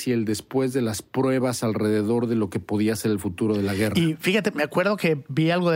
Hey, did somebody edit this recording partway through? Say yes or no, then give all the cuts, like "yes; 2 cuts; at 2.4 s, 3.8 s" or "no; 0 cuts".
no; 0 cuts